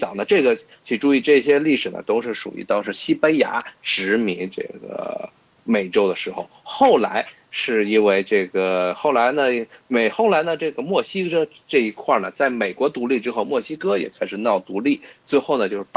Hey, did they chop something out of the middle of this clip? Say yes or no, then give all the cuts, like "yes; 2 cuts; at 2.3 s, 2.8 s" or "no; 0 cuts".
no; 0 cuts